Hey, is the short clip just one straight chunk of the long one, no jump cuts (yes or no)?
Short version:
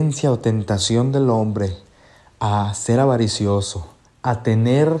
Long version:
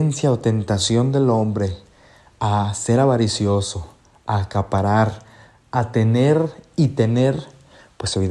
no